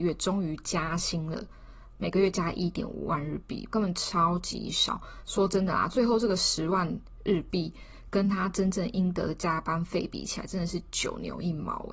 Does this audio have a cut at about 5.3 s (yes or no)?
yes